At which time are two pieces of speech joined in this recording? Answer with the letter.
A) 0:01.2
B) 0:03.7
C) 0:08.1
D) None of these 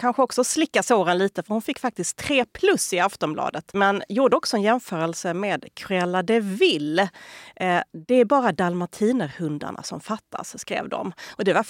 D